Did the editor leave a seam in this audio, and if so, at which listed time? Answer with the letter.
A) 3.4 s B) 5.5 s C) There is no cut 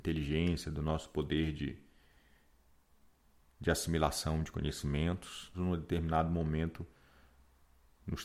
B